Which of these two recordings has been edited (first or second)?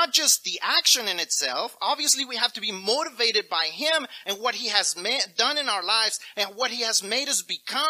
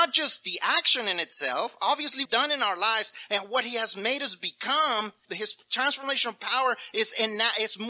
second